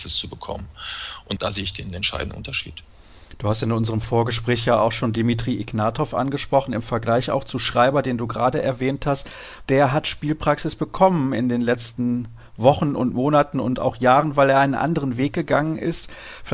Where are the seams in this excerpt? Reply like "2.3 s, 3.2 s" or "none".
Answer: 9.7 s